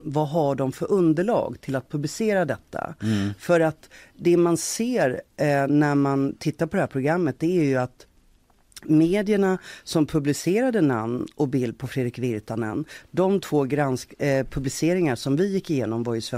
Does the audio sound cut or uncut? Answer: uncut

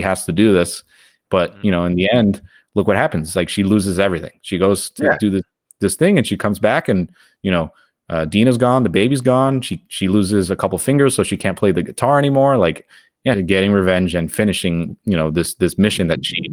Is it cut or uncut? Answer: cut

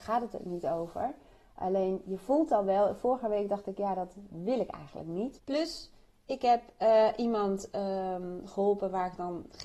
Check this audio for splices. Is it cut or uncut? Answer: cut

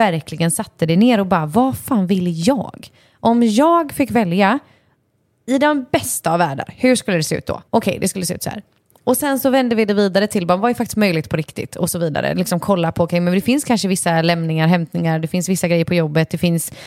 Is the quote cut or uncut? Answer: cut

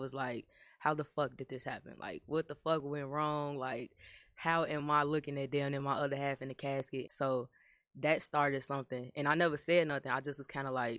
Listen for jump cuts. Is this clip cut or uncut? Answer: cut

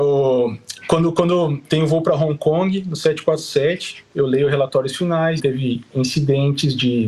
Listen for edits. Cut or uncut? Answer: cut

